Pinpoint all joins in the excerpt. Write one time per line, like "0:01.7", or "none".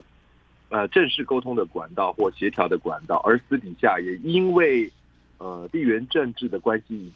none